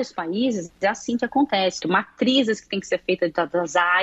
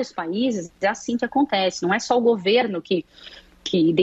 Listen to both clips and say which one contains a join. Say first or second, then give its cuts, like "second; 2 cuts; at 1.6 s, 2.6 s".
first; 1 cut; at 1.8 s